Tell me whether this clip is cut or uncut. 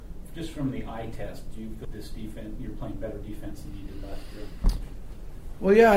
cut